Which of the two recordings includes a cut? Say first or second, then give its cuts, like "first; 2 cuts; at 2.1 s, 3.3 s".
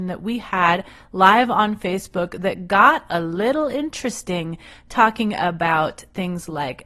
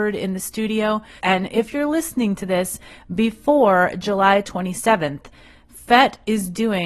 second; 1 cut; at 1.2 s